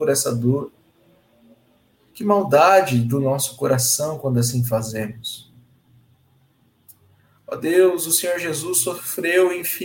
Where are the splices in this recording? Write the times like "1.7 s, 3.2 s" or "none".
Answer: none